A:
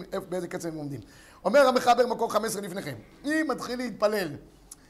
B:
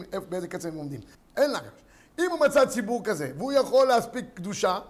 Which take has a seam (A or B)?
B